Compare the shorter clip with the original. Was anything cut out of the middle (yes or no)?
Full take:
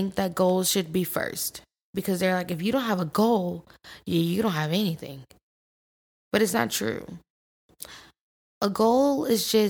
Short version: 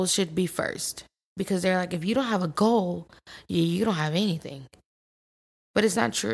no